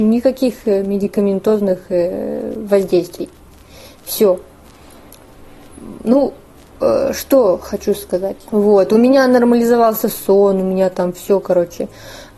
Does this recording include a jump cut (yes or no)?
yes